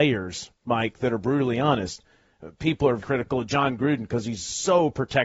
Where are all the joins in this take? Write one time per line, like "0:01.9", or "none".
0:03.0